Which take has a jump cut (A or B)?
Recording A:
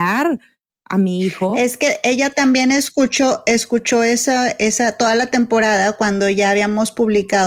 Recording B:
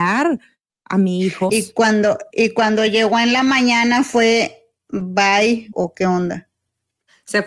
B